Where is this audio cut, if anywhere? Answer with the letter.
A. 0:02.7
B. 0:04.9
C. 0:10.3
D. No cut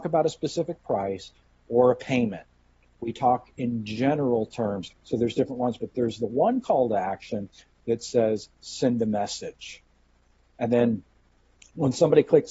B